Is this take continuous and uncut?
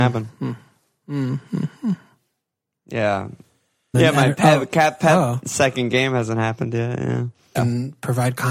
no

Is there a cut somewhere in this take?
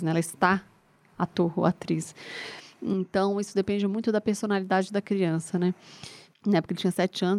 yes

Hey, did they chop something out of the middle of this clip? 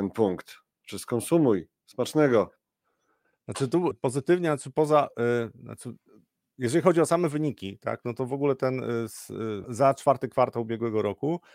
yes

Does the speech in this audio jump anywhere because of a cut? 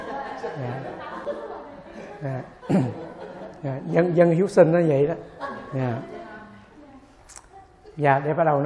no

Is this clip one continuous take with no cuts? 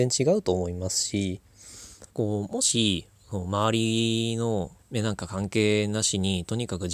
no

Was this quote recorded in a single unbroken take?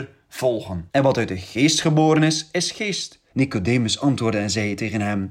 no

